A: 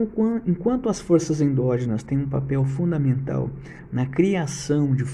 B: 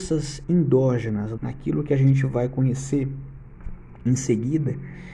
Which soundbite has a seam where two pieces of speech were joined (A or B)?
B